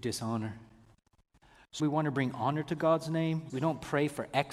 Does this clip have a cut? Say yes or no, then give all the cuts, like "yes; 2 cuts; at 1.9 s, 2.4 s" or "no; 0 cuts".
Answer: yes; 2 cuts; at 1.8 s, 3.5 s